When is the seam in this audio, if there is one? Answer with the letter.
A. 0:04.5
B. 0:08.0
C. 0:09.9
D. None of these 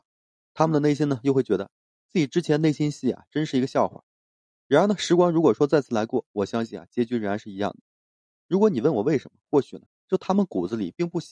C